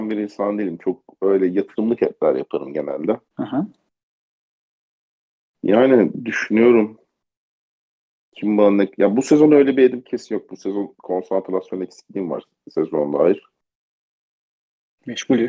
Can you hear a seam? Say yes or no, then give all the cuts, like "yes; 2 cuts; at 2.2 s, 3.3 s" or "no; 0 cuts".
yes; 1 cut; at 3.3 s